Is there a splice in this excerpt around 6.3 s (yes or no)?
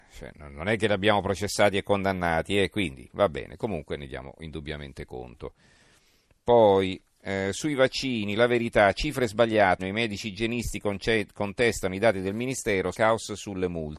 no